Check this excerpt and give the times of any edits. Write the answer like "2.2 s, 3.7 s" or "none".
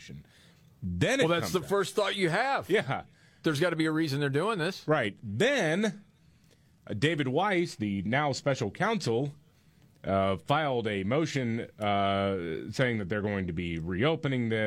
none